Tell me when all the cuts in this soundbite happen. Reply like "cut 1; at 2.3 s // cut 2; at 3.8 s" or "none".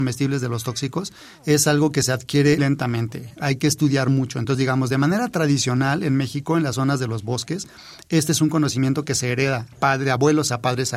cut 1; at 2.6 s